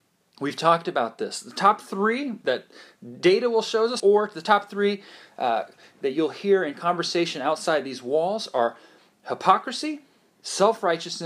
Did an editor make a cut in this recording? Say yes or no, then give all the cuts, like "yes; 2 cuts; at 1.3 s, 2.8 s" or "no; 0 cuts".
yes; 2 cuts; at 2.4 s, 4.0 s